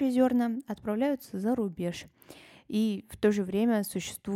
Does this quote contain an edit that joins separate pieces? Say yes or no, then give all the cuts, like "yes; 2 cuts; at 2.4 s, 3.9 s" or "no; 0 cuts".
no; 0 cuts